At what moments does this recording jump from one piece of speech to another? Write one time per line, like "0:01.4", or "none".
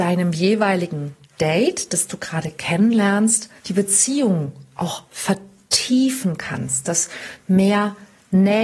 0:03.6